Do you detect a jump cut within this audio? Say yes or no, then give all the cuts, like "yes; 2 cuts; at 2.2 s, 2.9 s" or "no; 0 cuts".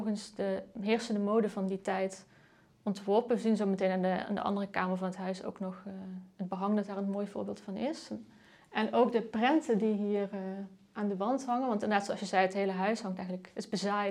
no; 0 cuts